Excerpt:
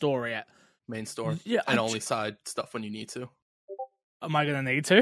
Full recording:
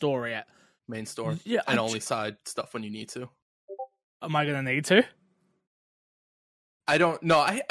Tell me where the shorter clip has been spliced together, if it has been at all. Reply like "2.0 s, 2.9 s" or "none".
none